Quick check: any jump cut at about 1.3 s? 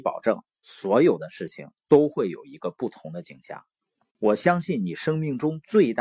no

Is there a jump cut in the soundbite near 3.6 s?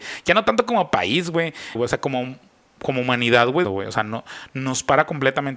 yes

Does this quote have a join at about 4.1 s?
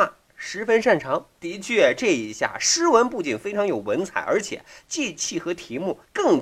no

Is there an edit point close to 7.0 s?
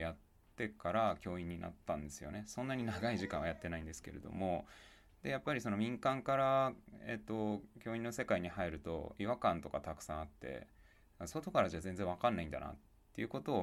no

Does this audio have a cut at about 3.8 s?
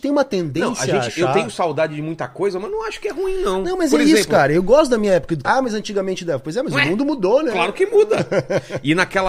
no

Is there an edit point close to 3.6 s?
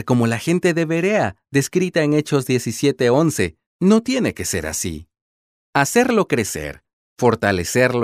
yes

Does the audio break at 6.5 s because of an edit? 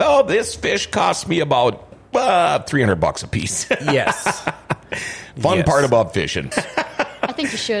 yes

